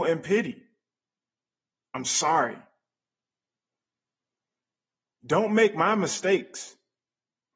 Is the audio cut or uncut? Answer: uncut